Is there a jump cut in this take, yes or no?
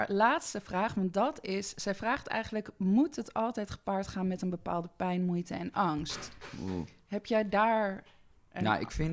no